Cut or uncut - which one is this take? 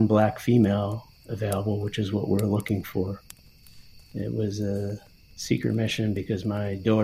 cut